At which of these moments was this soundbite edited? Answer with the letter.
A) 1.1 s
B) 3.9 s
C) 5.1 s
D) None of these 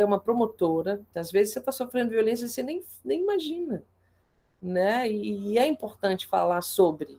A